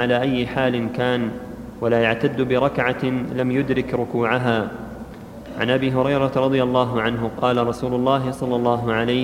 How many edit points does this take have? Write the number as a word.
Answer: one